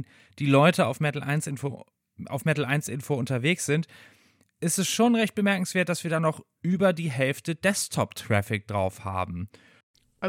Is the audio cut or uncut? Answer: uncut